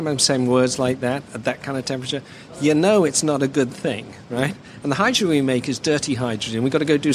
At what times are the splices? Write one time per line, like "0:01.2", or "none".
none